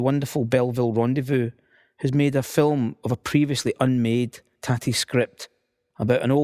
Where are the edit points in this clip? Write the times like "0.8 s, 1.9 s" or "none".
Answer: none